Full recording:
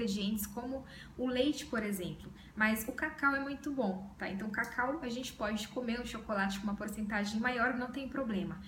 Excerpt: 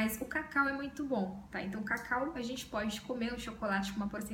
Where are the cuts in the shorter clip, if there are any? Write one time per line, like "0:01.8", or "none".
none